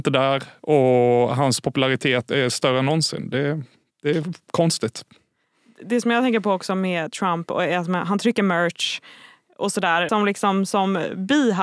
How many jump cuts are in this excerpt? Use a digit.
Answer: 1